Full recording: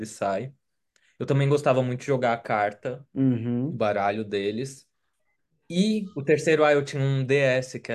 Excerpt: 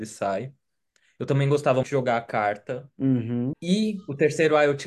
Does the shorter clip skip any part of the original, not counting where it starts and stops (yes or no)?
yes